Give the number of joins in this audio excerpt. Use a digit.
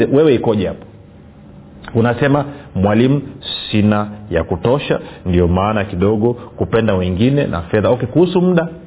0